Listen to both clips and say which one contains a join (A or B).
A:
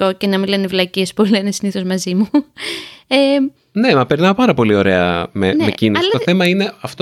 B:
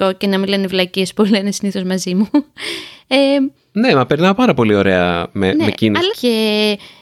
B